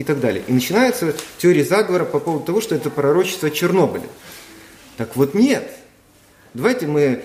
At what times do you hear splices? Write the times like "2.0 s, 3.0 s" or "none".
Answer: none